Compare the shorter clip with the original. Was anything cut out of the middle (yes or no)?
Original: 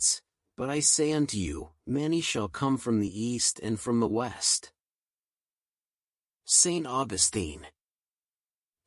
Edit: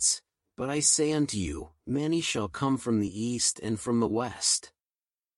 no